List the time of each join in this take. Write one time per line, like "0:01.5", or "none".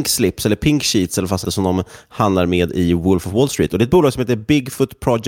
0:01.4